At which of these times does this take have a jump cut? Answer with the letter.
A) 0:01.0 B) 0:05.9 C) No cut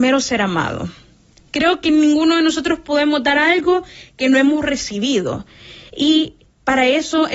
C